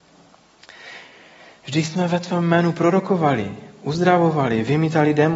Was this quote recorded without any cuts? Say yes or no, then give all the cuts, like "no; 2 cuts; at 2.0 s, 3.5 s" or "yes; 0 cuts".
yes; 0 cuts